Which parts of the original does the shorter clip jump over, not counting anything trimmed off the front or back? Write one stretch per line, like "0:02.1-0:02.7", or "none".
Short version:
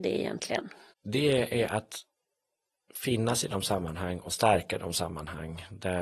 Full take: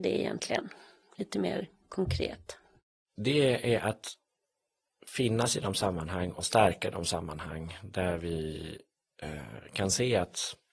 0:00.9-0:03.0